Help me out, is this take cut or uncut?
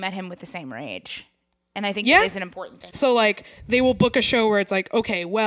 cut